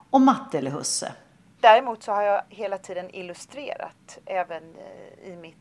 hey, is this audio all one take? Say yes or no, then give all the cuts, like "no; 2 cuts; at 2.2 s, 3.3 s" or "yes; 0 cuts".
no; 1 cut; at 1.6 s